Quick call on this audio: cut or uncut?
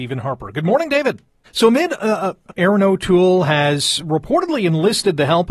cut